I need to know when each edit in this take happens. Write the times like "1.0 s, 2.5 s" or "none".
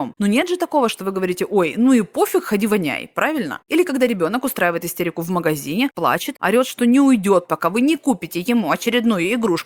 6.4 s